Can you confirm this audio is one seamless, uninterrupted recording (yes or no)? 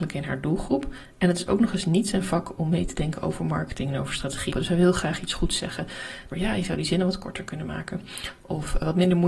no